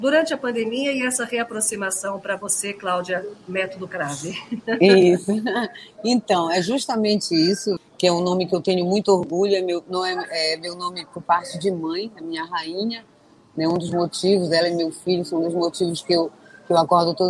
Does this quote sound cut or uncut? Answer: cut